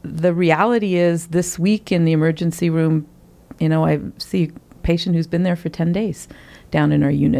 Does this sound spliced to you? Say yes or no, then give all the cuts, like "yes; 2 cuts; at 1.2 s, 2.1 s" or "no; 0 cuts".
no; 0 cuts